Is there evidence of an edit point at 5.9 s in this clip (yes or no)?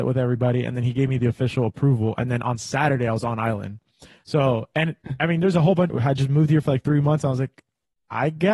yes